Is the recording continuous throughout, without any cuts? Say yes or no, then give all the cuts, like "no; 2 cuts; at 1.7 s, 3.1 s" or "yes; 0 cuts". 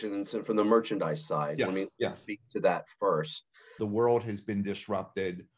no; 1 cut; at 3.8 s